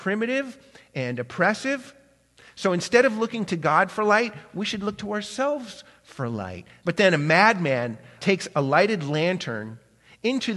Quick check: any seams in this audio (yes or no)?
yes